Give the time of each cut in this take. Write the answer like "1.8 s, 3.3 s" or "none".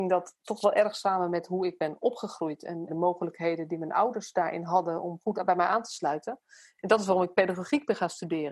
2.9 s